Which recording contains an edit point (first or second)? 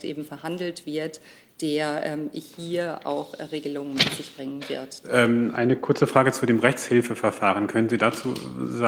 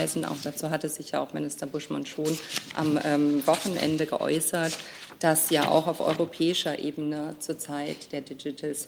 first